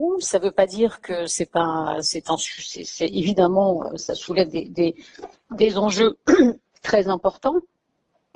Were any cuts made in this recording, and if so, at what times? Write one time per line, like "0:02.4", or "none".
0:01.3